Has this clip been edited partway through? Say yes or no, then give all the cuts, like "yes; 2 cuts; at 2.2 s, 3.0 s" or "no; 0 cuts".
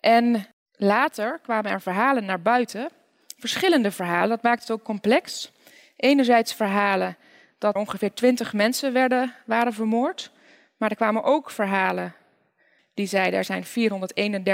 yes; 2 cuts; at 7.8 s, 12.8 s